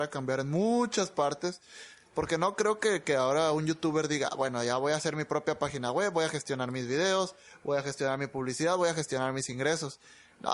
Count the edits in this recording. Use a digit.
0